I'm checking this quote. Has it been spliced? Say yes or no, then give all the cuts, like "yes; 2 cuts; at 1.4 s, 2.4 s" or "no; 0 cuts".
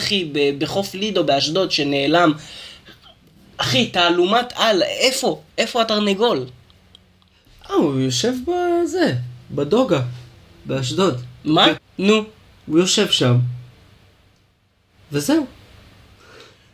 yes; 1 cut; at 11.8 s